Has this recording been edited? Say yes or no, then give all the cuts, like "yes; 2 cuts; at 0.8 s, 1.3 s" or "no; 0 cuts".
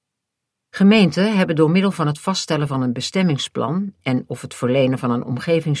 no; 0 cuts